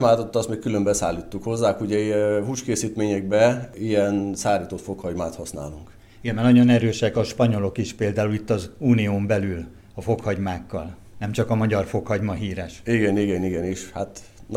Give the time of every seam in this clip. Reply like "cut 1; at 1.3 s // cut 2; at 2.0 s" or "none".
none